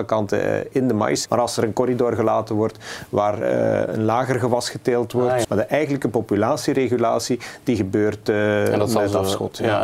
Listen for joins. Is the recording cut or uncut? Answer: cut